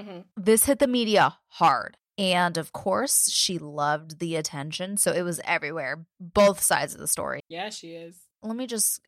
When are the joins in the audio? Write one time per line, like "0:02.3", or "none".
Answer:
0:07.4